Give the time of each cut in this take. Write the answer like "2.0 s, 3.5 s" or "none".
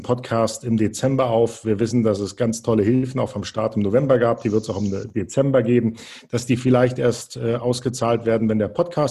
none